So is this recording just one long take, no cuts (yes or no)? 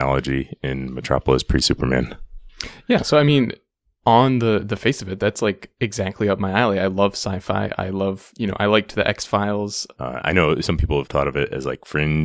no